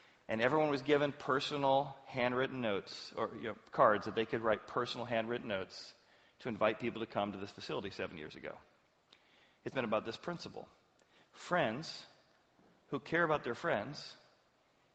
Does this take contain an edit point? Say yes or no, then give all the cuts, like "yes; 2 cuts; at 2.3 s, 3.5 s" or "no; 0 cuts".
yes; 1 cut; at 9.7 s